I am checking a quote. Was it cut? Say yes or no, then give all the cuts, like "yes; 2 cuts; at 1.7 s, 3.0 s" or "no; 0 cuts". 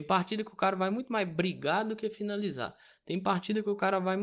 no; 0 cuts